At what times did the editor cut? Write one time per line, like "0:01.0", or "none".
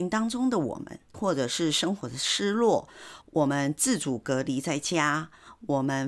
0:01.1
0:03.2